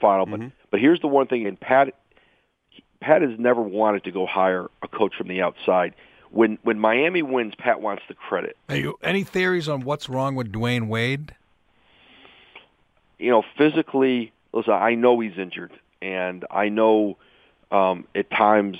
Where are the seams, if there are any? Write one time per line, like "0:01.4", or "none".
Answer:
0:01.4
0:08.6